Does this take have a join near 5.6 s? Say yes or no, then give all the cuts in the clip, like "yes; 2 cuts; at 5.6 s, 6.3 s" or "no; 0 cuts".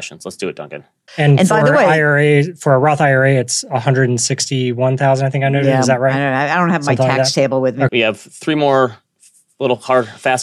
no; 2 cuts; at 1.1 s, 7.9 s